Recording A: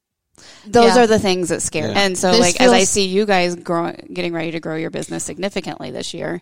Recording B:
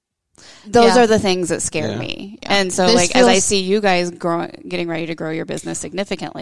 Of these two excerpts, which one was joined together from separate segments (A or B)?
A